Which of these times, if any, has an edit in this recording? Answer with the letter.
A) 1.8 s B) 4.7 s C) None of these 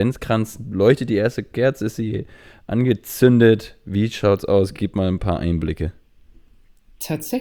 C